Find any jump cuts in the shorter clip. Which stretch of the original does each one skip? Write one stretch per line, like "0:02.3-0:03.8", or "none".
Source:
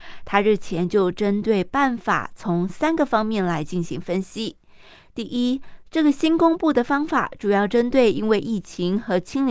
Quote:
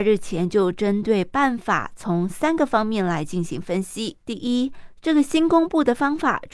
0:04.6-0:05.1